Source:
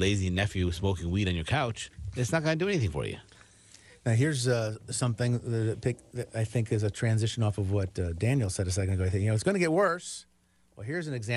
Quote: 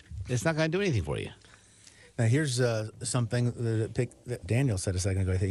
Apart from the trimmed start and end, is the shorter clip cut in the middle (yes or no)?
yes